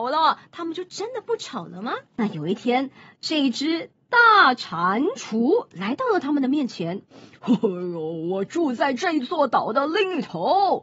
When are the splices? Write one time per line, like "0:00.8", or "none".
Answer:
0:02.1